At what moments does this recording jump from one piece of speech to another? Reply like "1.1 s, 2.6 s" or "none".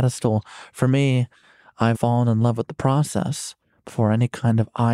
1.9 s